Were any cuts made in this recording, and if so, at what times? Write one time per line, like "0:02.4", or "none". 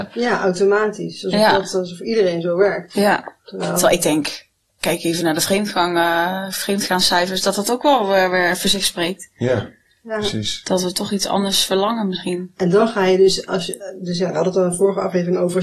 none